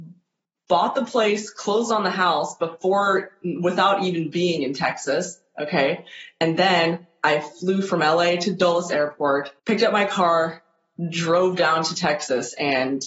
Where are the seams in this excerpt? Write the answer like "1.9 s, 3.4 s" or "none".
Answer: 9.6 s

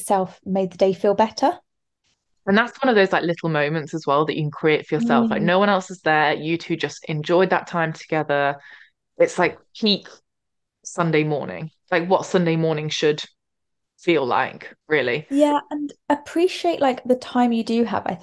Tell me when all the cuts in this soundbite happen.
14.8 s

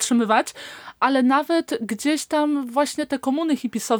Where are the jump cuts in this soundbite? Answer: none

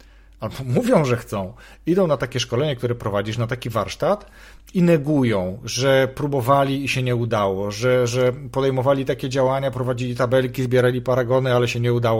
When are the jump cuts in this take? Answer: none

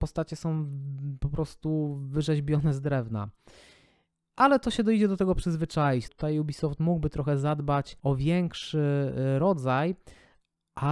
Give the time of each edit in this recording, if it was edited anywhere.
6.1 s, 8.0 s

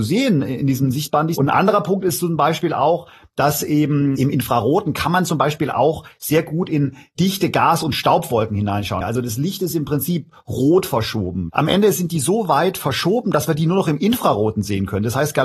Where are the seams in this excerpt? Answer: 9.0 s

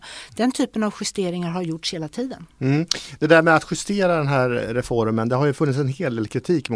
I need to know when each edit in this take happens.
none

